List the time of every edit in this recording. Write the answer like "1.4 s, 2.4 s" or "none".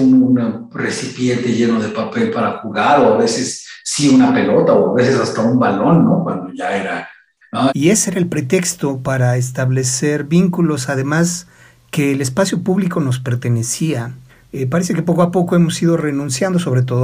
7.7 s, 14.5 s